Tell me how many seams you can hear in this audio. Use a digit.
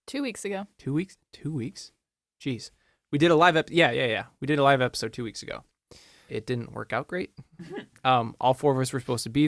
1